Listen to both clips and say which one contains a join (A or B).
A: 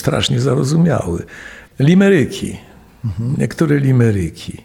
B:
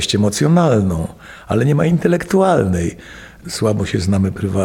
A